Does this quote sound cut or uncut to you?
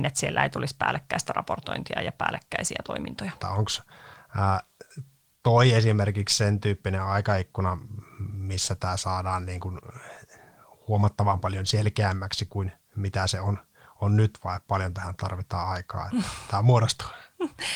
cut